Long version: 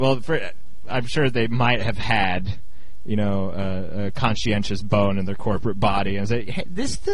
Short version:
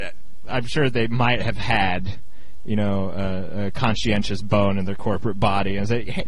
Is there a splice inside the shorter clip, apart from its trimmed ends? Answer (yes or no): no